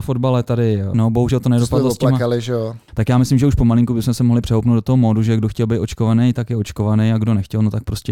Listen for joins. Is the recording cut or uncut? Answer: cut